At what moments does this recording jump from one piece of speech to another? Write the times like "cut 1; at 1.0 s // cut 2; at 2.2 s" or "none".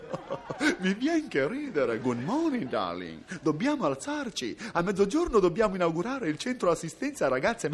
cut 1; at 2.0 s